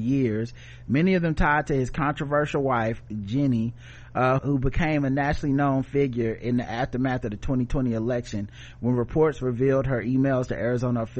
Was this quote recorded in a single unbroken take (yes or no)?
no